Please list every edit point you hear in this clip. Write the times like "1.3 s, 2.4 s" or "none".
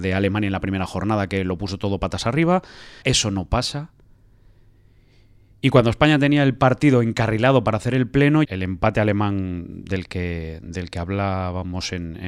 3.0 s, 8.4 s